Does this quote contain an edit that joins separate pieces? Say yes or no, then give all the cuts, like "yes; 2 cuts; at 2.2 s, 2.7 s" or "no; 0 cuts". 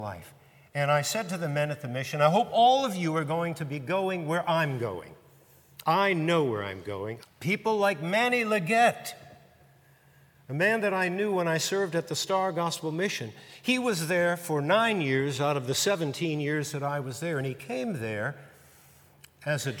yes; 1 cut; at 7.2 s